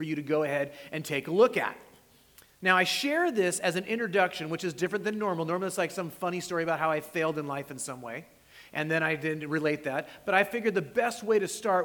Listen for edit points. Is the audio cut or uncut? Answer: uncut